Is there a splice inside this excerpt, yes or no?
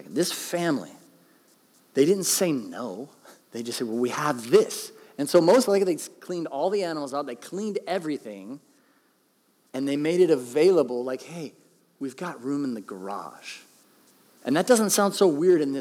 yes